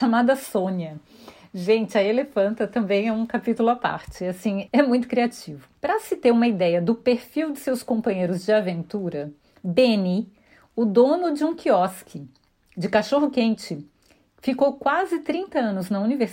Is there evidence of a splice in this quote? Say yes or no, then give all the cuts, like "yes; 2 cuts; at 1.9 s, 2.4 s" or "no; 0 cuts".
yes; 2 cuts; at 4.7 s, 5.8 s